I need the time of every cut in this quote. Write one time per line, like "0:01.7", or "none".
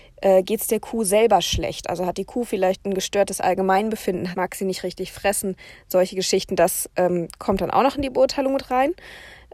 0:04.3